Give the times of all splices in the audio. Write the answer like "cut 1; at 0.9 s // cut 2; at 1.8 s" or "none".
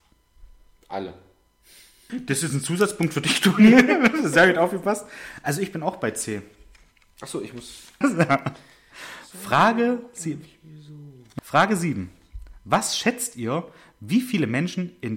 cut 1; at 2.1 s // cut 2; at 8.0 s // cut 3; at 11.4 s